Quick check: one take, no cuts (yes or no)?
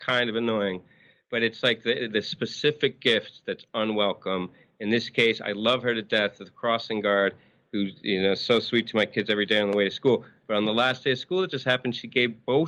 yes